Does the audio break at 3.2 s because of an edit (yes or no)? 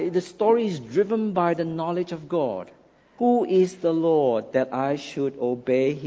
yes